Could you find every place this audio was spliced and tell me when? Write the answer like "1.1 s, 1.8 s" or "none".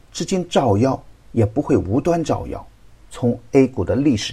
3.1 s